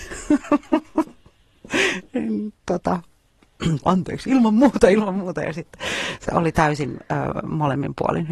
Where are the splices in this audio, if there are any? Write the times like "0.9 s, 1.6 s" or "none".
3.8 s, 6.2 s